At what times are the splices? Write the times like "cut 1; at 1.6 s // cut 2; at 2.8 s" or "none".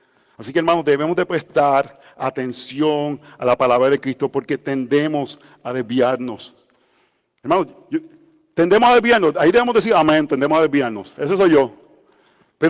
none